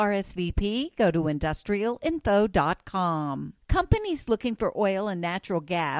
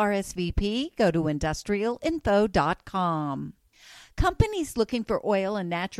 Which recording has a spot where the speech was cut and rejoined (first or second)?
first